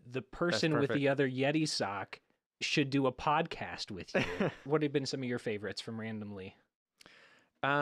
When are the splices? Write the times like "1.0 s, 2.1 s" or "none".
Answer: 4.7 s